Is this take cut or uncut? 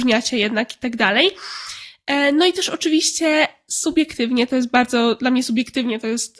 uncut